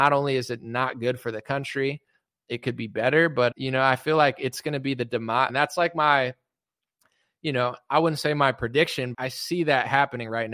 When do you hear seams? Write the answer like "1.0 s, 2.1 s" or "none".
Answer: 3.5 s, 5.5 s, 9.1 s